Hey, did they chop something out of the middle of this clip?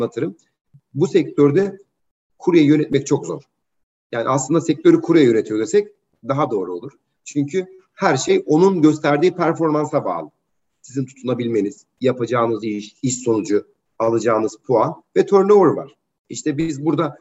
no; 0 cuts

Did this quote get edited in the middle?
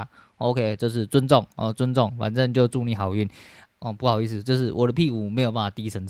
yes; 1 cut; at 3.7 s

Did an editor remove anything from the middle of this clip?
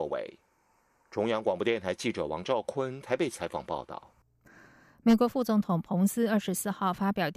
no; 0 cuts

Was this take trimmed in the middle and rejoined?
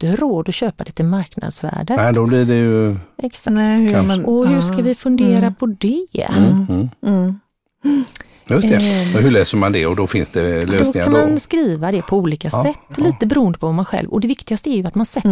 no; 0 cuts

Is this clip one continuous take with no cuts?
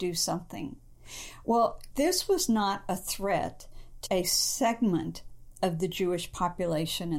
no; 2 cuts; at 1.9 s, 4.1 s

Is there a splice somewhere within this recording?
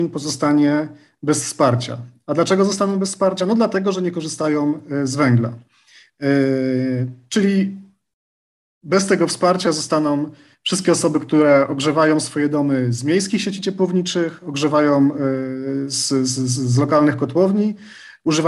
no; 0 cuts

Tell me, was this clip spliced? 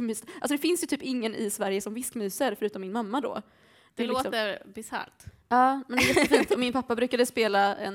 no; 0 cuts

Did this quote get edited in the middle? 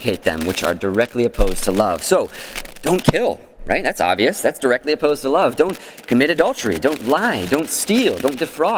no; 0 cuts

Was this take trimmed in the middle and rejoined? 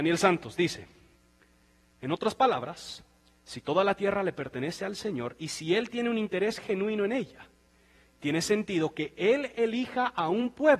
no; 0 cuts

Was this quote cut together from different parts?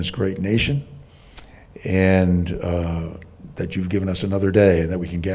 no; 0 cuts

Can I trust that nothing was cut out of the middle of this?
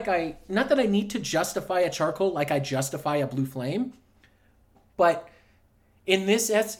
yes; 0 cuts

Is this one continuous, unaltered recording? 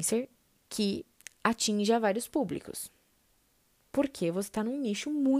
yes; 0 cuts

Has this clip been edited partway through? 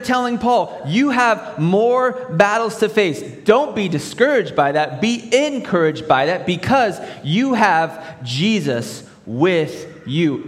no; 0 cuts

